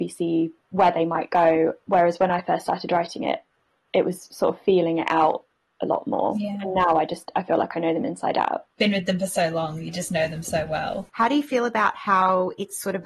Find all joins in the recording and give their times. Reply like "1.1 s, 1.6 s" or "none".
8.8 s, 11.1 s